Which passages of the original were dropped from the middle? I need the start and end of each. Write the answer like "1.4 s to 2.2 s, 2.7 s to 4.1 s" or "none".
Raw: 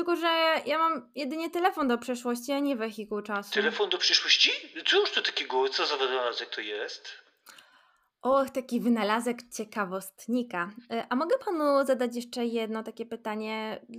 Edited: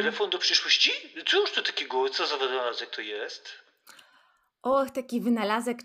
none